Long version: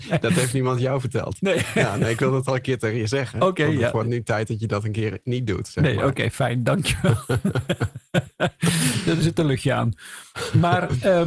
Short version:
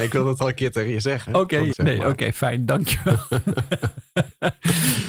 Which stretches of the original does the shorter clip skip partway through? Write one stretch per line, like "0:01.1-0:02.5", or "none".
0:03.8-0:05.7